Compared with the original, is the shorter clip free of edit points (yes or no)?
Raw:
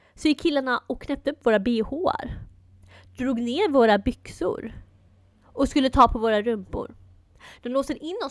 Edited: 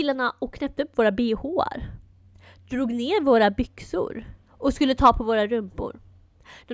no